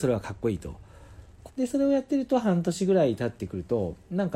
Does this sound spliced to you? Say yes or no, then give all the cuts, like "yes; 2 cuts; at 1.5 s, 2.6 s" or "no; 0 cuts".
yes; 1 cut; at 1.5 s